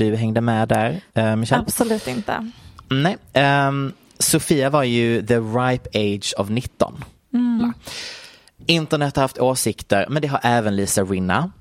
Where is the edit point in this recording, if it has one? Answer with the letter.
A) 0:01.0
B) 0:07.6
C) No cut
B